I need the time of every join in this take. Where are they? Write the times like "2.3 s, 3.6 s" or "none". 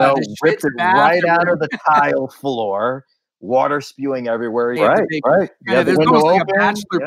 4.8 s

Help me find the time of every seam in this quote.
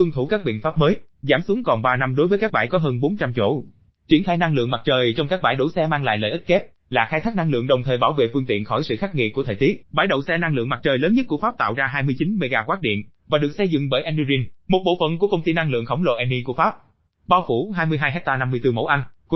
9.8 s

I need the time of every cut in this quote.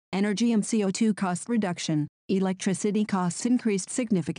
2.2 s

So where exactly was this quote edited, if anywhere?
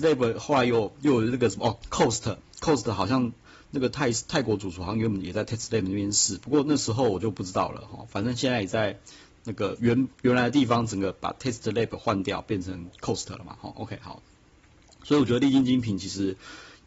none

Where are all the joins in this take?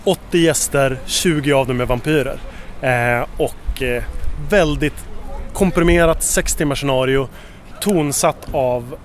none

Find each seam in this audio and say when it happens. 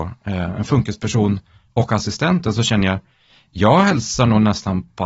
none

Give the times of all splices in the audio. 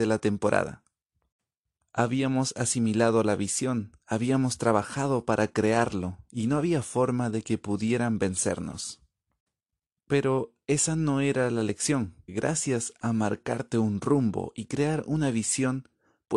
12.3 s

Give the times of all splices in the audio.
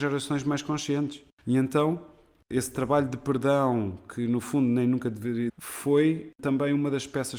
1.4 s, 5.5 s

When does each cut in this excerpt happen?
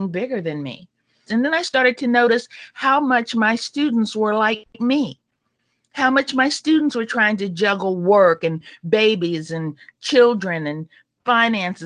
1.3 s

